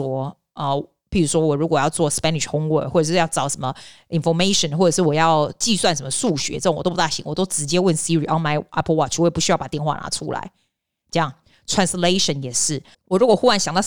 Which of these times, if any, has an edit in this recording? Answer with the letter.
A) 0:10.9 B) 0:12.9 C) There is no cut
B